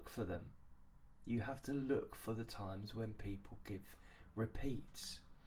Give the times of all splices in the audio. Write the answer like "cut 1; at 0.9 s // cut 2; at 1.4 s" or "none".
none